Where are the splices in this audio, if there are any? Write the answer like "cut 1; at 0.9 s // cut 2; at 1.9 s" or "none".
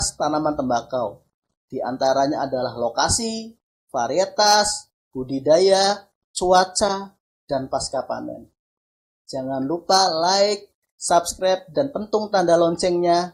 cut 1; at 9.2 s